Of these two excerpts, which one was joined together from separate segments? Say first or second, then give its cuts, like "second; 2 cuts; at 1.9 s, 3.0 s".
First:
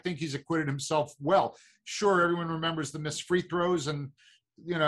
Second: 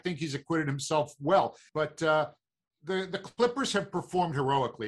second; 1 cut; at 1.7 s